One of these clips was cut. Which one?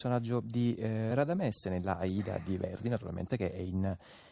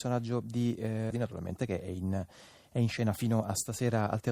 second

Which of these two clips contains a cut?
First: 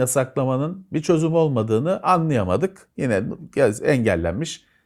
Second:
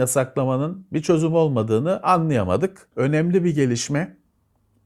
second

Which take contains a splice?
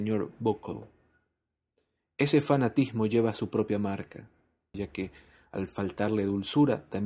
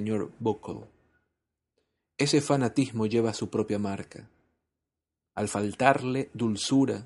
first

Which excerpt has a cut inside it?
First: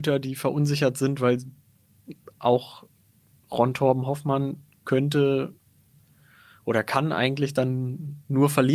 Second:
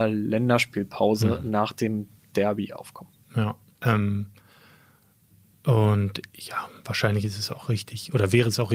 second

